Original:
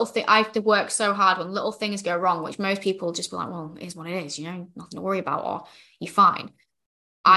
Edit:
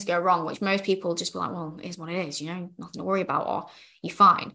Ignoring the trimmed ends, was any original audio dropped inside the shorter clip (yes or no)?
no